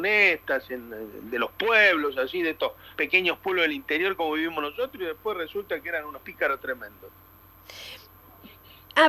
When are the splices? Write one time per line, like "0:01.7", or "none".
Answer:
none